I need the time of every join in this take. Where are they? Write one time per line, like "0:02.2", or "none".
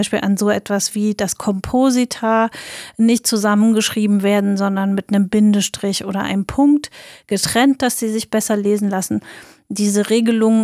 none